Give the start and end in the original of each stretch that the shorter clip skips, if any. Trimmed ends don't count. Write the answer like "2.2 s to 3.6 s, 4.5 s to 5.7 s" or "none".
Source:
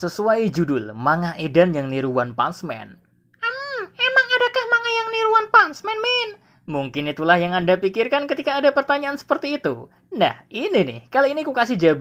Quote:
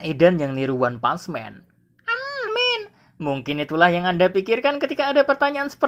3.8 s to 5.9 s